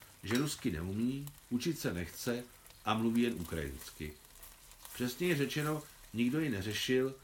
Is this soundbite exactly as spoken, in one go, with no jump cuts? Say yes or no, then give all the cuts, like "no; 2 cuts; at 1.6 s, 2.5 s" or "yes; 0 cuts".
yes; 0 cuts